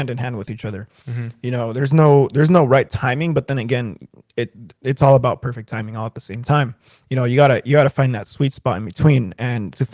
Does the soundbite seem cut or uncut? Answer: uncut